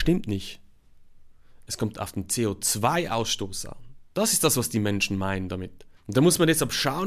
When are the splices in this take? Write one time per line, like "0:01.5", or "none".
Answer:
0:06.0